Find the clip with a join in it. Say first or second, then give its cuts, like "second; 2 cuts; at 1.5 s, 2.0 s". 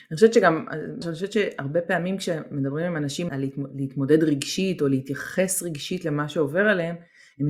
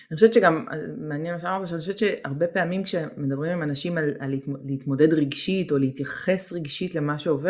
first; 2 cuts; at 1.0 s, 3.3 s